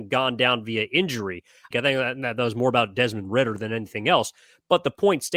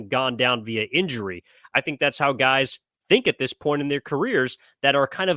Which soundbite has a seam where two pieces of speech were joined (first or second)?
first